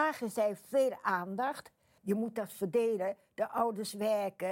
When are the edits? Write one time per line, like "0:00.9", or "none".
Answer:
0:02.0